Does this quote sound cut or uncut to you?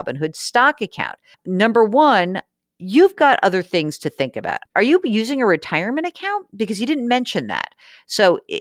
cut